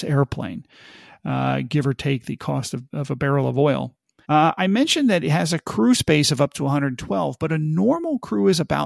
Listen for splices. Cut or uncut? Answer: cut